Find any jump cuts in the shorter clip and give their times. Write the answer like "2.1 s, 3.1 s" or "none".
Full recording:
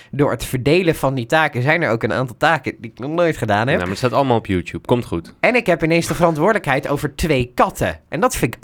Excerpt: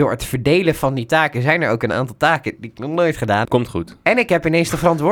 3.4 s